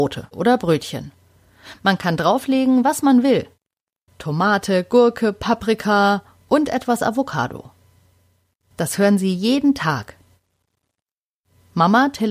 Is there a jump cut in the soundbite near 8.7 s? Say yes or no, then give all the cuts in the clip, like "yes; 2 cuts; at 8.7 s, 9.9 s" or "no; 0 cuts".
yes; 2 cuts; at 4.1 s, 8.7 s